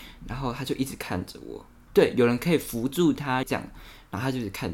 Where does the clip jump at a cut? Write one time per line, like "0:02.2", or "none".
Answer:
0:01.9
0:03.4